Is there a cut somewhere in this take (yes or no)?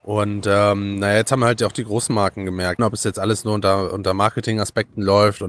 yes